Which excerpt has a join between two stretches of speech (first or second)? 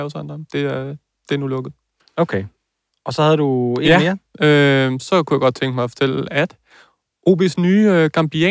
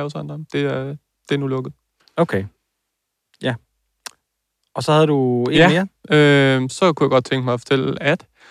first